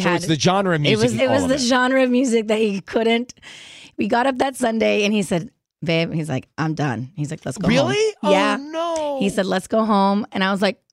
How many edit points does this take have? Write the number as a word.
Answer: one